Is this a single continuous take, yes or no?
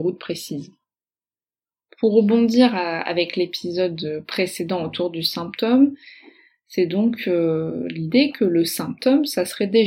yes